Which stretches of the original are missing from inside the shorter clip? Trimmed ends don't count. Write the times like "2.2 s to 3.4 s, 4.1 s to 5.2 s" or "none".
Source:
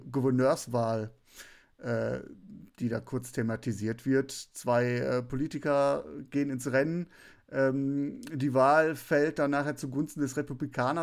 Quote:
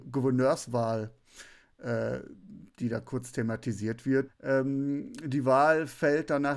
4.3 s to 7.4 s